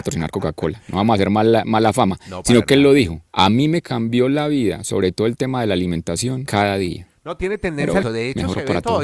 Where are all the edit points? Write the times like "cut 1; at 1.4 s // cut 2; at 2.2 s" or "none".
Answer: cut 1; at 3.3 s // cut 2; at 6.5 s // cut 3; at 8.0 s